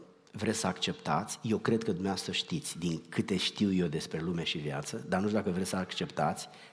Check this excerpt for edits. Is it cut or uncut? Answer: uncut